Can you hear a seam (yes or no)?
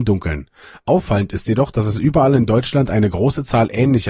no